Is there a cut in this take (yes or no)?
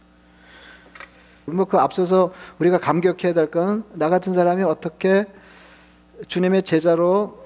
yes